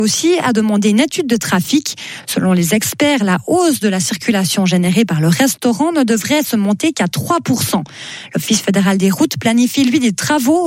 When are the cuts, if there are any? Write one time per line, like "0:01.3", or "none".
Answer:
none